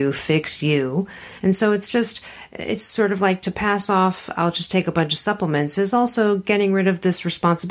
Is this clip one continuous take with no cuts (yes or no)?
no